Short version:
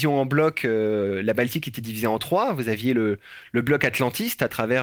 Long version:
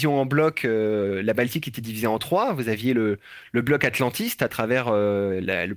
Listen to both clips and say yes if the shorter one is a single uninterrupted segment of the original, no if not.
yes